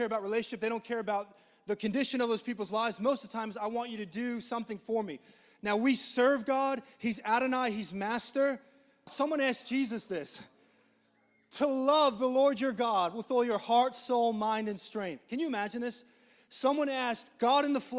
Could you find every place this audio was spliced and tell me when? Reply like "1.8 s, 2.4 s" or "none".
9.1 s